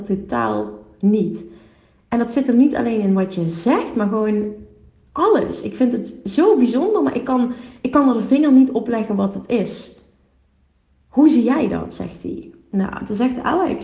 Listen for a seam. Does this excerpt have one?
no; 0 cuts

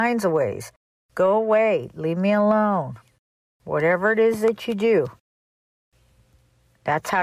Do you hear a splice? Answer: no; 0 cuts

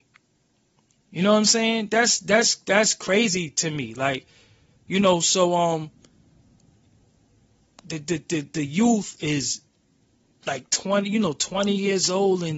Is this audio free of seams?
yes; 0 cuts

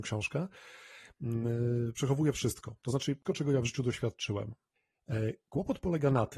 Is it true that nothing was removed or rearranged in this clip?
no; 2 cuts; at 1.9 s, 3.2 s

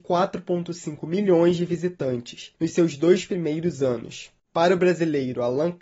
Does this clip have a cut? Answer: yes; 1 cut; at 2.6 s

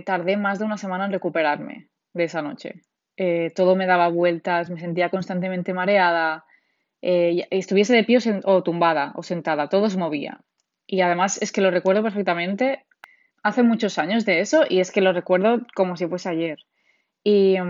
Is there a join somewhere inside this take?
no; 0 cuts

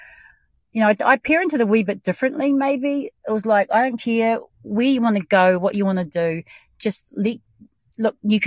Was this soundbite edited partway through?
no; 0 cuts

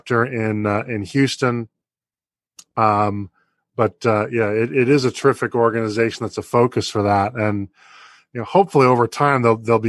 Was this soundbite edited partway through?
no; 0 cuts

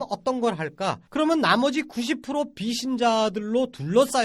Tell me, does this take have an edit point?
yes; 1 cut; at 1.1 s

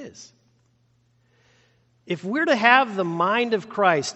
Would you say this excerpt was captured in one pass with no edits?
yes; 0 cuts

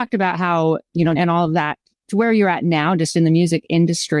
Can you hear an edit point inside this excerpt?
yes; 1 cut; at 1.2 s

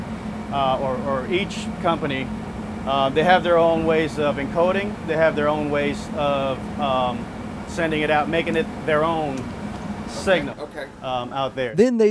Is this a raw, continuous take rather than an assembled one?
no; 2 cuts; at 5.1 s, 10.5 s

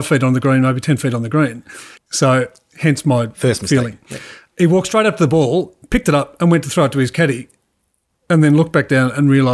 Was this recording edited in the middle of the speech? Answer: yes; 1 cut; at 2.0 s

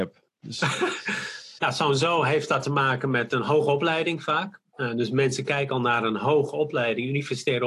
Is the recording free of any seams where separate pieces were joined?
no; 1 cut; at 1.6 s

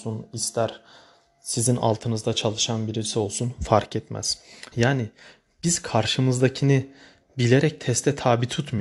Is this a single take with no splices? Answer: no; 1 cut; at 4.7 s

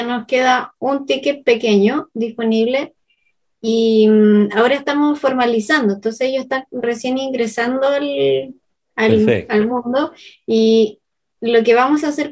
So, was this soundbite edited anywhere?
no; 0 cuts

